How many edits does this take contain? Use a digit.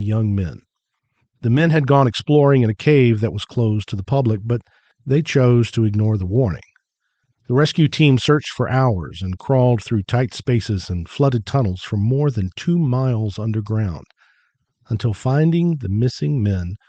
0